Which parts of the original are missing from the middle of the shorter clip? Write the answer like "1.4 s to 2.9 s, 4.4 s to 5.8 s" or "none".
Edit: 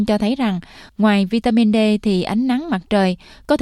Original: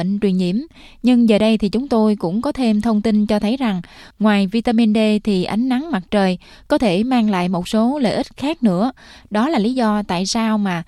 none